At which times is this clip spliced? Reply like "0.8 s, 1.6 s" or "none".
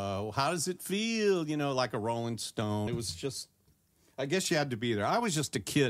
2.9 s